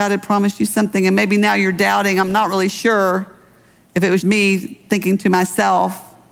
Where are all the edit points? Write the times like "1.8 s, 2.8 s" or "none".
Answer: 4.2 s